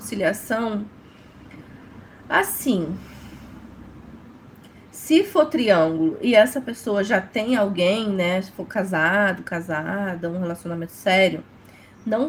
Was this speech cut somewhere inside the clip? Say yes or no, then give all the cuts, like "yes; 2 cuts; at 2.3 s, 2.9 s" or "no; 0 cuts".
no; 0 cuts